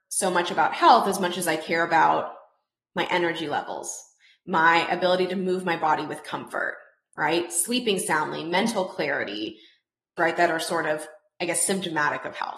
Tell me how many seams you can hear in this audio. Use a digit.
1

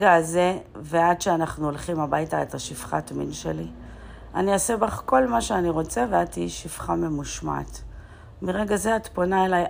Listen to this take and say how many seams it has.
0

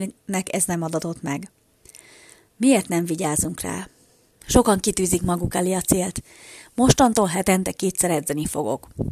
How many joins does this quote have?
1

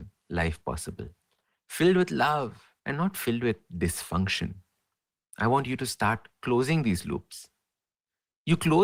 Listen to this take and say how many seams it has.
1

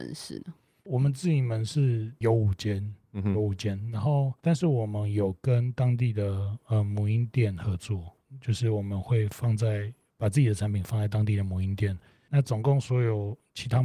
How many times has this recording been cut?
1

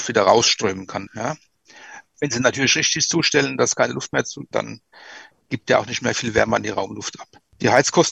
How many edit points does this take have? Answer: 2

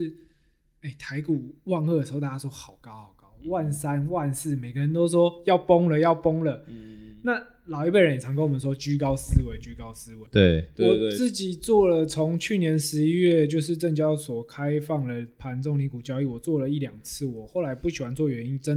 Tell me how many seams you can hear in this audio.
1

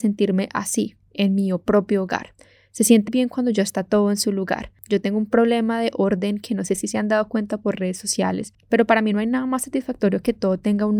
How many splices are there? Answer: 1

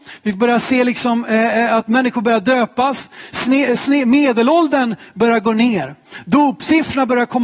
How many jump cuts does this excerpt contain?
0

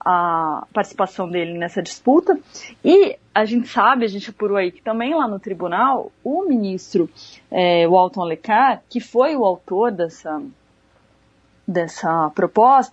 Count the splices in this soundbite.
0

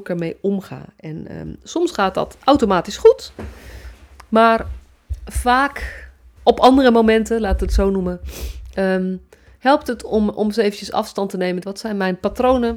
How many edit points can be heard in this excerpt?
2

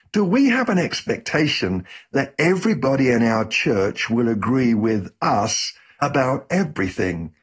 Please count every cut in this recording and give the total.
0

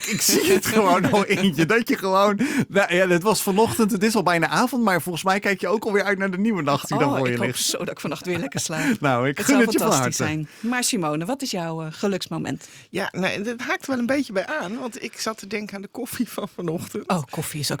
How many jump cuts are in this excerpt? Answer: 1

